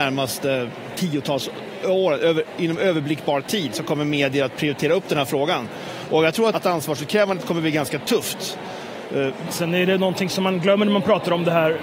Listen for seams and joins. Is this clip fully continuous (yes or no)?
no